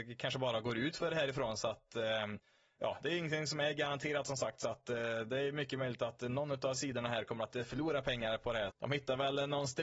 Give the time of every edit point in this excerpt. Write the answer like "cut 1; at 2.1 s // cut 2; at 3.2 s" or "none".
cut 1; at 8.7 s